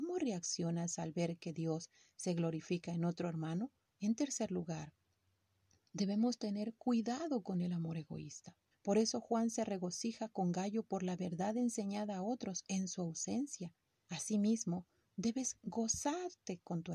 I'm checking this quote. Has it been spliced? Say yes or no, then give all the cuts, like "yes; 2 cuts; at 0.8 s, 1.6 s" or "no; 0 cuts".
yes; 3 cuts; at 3.8 s, 8.7 s, 14.0 s